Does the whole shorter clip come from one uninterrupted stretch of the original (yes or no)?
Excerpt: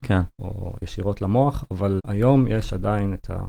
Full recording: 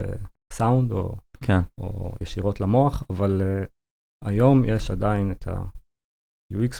no